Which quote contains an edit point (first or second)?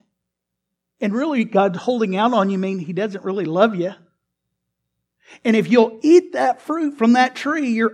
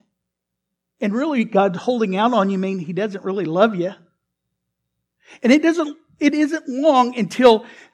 second